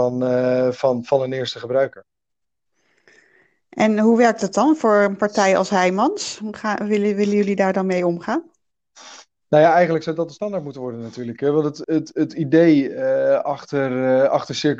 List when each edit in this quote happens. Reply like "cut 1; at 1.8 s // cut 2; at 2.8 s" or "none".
cut 1; at 11.8 s